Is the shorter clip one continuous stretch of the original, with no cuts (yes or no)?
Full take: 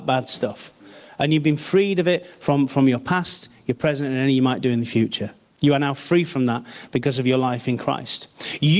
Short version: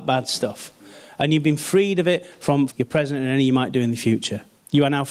no